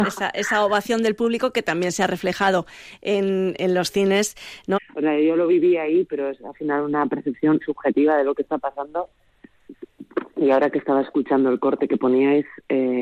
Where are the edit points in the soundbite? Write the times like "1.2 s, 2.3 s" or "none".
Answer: 4.8 s, 7.6 s